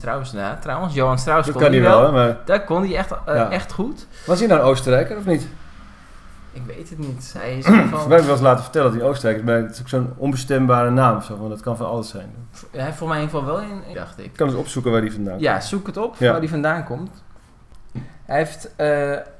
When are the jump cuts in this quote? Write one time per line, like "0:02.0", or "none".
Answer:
0:13.9
0:18.0